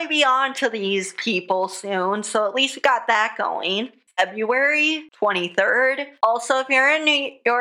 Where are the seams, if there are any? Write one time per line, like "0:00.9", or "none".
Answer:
0:04.1